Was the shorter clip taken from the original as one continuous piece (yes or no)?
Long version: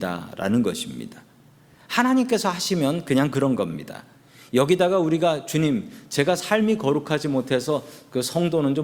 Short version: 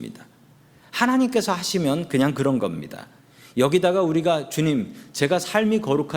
yes